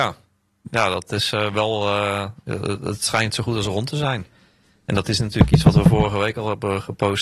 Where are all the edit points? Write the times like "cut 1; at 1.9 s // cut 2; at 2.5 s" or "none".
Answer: none